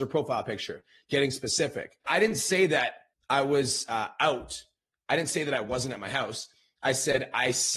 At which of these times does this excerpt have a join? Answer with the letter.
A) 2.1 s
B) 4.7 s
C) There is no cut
A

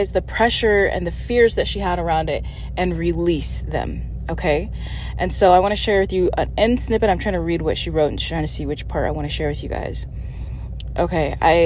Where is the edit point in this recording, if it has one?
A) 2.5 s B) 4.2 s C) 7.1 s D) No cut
D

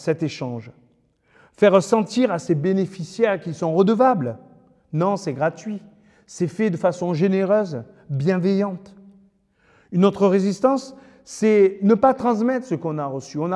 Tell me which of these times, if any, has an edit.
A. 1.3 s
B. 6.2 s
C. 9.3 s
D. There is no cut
D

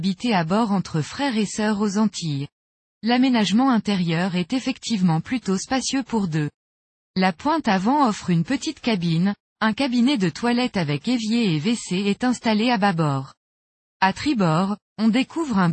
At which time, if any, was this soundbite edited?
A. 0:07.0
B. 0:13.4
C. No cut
C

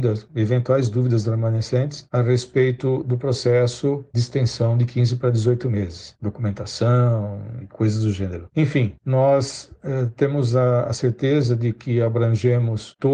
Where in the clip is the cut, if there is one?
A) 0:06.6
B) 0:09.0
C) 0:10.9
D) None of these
D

